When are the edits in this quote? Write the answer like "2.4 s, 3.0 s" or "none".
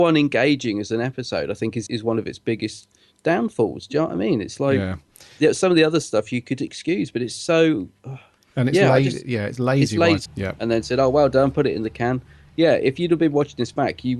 1.9 s, 10.3 s

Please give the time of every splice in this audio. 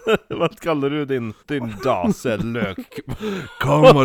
1.4 s

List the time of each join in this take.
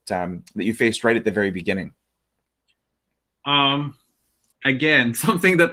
none

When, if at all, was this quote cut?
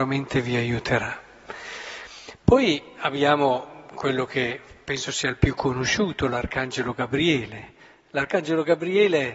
none

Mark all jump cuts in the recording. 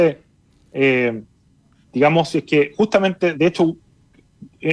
3.3 s

